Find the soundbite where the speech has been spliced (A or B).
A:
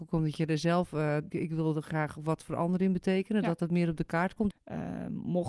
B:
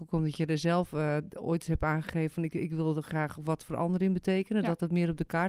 A